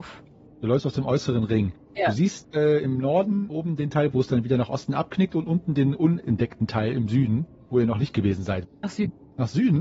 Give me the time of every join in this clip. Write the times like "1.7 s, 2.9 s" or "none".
4.1 s, 8.6 s

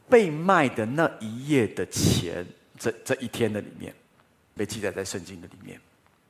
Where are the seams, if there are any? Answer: 4.6 s

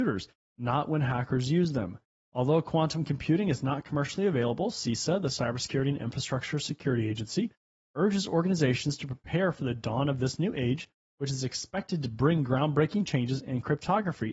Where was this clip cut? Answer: none

